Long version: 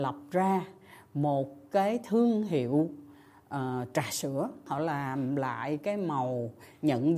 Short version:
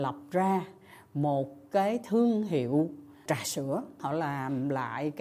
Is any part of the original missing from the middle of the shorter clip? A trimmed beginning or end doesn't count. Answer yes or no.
yes